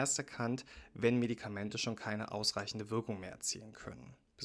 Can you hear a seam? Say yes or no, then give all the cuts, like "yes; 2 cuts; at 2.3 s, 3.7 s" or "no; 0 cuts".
no; 0 cuts